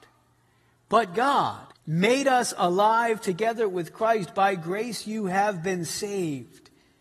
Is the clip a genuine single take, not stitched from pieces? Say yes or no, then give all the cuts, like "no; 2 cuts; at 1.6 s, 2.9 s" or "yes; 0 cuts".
no; 1 cut; at 1.7 s